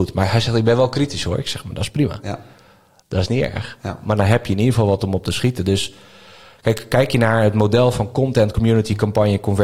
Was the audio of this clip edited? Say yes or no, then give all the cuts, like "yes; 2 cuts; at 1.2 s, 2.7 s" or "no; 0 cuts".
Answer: no; 0 cuts